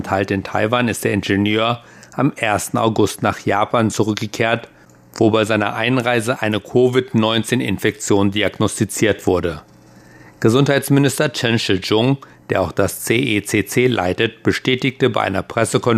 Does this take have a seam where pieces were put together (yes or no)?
no